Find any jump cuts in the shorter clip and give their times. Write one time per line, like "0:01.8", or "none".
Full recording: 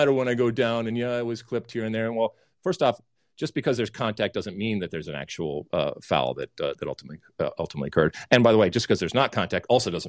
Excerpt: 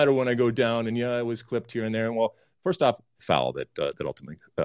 0:03.2